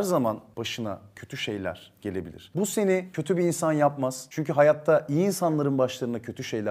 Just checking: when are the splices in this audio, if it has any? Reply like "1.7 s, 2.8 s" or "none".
none